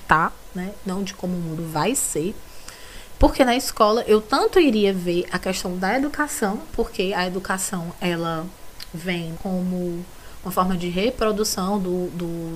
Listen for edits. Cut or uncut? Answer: cut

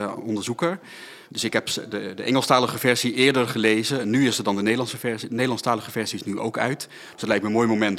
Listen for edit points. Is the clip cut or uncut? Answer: uncut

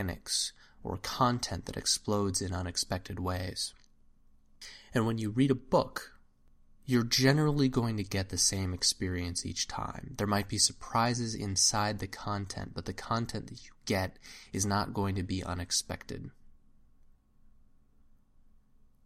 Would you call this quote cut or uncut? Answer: uncut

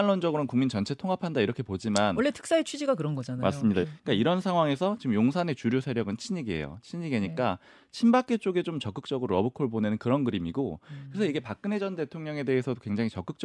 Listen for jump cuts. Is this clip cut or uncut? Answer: cut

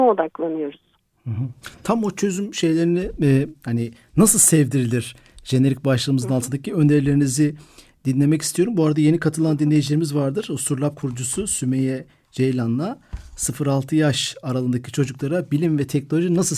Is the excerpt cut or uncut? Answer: uncut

